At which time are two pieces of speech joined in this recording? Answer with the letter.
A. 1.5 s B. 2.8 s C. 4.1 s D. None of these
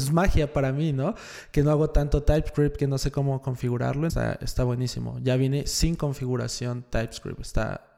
C